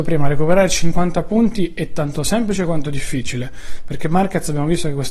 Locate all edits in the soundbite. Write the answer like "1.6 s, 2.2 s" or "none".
none

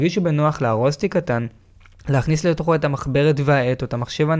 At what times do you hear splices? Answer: none

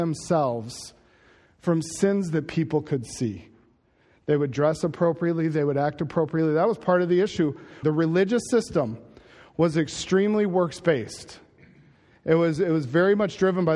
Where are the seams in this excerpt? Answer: 7.8 s

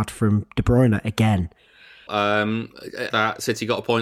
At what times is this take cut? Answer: 2.1 s, 3.1 s

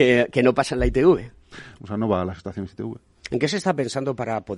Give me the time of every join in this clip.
1.8 s

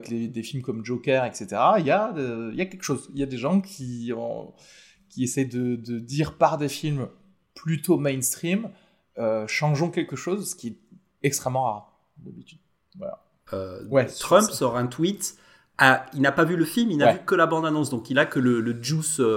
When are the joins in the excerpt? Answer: 13.5 s

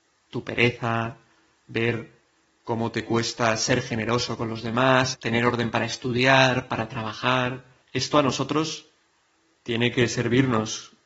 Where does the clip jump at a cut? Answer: 5.1 s, 7.8 s

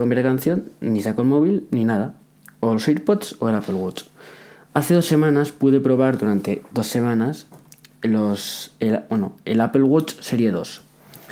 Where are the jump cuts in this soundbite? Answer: none

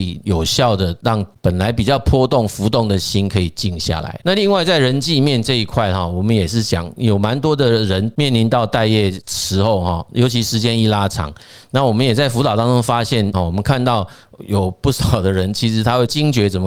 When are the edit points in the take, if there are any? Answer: 11.6 s, 13.3 s

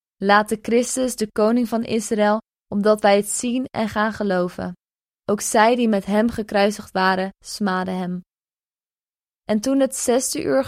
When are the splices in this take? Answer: 2.5 s

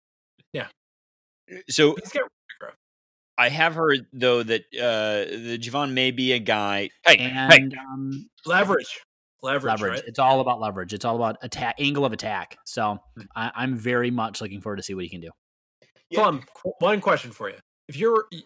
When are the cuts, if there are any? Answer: 6.9 s, 13.3 s

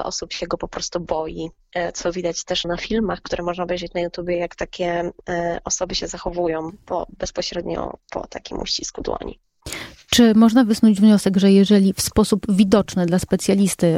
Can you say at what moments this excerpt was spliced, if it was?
2.6 s

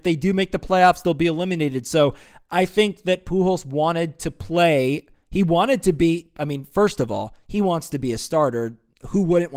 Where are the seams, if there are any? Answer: none

